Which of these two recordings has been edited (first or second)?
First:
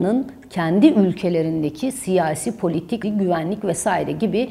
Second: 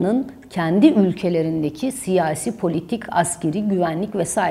first